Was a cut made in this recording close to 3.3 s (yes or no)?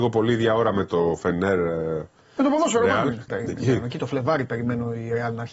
yes